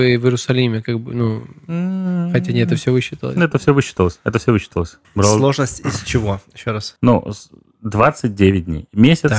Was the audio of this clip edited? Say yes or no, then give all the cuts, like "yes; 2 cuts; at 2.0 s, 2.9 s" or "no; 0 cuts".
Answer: yes; 1 cut; at 5.0 s